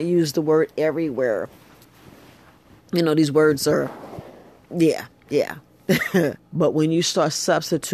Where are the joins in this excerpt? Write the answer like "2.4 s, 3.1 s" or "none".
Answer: 6.4 s